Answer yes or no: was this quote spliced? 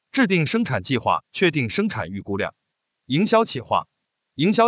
yes